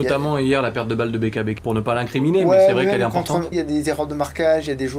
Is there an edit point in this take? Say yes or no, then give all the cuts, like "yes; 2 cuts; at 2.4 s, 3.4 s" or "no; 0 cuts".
yes; 2 cuts; at 1.6 s, 3.5 s